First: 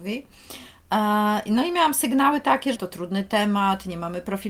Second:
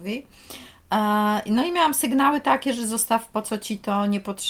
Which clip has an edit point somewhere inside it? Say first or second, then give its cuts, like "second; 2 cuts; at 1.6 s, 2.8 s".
first; 1 cut; at 2.8 s